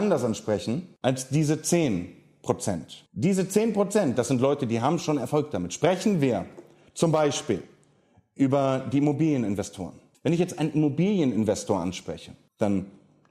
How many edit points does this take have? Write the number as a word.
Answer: zero